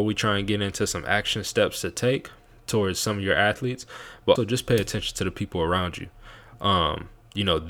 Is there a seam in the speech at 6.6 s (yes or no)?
no